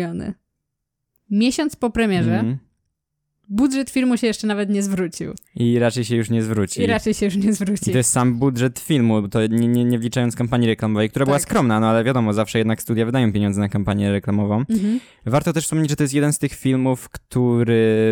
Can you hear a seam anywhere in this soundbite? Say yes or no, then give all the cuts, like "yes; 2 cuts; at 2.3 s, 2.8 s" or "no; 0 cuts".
no; 0 cuts